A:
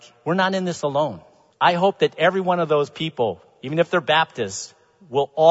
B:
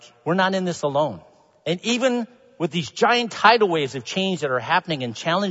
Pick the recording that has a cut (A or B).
A